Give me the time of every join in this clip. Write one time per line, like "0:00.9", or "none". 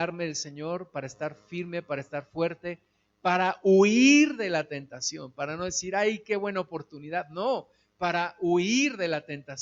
none